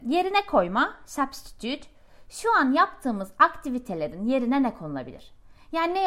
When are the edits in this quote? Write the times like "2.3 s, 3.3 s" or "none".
none